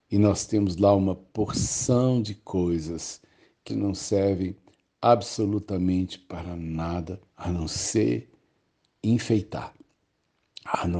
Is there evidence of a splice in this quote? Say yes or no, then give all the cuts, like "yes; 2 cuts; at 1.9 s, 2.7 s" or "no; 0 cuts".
yes; 2 cuts; at 3.7 s, 7.3 s